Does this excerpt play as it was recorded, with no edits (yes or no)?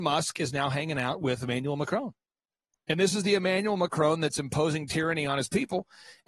yes